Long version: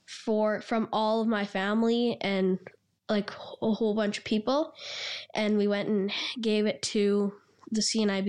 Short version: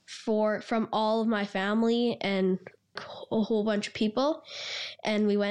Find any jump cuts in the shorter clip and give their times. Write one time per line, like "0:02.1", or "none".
0:03.0